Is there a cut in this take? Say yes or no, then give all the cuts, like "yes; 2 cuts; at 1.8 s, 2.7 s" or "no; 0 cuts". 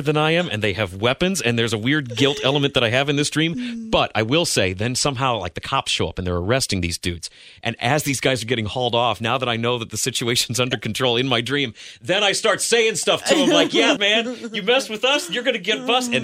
yes; 1 cut; at 14.0 s